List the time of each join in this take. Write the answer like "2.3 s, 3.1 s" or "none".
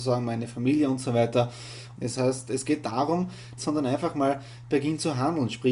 2.0 s, 3.6 s